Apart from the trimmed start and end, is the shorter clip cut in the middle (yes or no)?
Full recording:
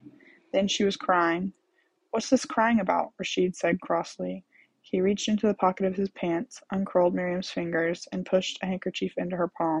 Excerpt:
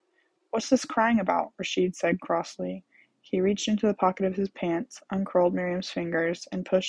no